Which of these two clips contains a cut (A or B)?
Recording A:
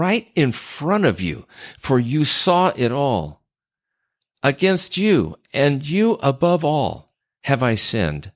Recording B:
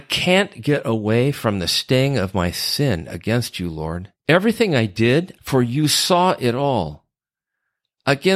B